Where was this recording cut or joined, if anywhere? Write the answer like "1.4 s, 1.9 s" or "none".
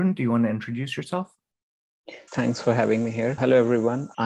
2.3 s